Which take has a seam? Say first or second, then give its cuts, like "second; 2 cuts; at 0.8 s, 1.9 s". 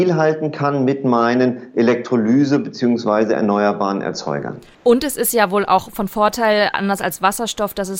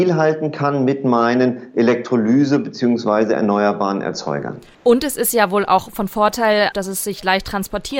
second; 1 cut; at 6.7 s